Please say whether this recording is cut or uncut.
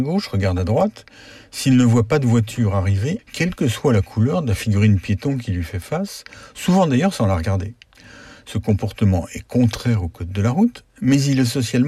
cut